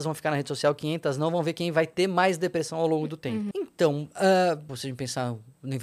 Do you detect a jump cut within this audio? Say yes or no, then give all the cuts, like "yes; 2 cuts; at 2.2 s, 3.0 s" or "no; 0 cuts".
yes; 2 cuts; at 3.5 s, 4.7 s